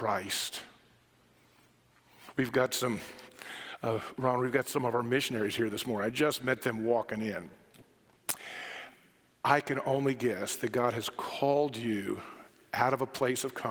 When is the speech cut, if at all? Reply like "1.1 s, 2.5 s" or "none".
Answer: none